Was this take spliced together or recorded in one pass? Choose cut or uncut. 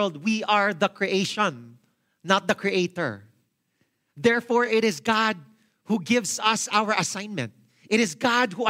uncut